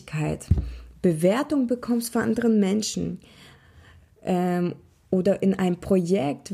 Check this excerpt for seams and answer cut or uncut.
uncut